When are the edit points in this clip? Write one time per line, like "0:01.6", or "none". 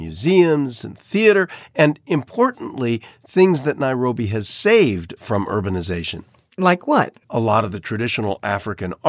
0:07.2